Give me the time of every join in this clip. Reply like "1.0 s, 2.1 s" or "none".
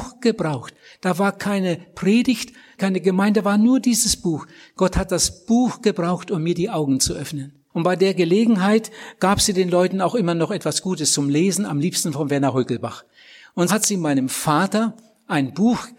2.8 s, 7.7 s, 13.7 s